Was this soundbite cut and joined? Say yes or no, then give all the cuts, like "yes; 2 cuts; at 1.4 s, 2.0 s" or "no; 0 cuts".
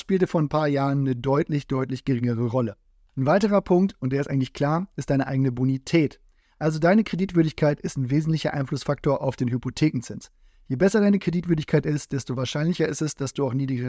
no; 0 cuts